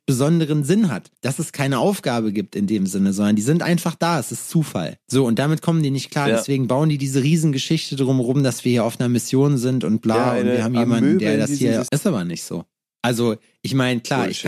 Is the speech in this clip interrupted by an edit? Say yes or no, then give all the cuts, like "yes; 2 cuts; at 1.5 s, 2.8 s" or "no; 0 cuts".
yes; 1 cut; at 11.9 s